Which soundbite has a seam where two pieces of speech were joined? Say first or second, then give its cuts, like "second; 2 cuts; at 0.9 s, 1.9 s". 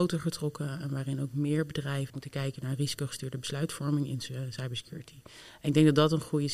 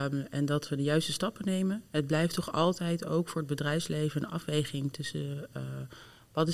first; 1 cut; at 2.1 s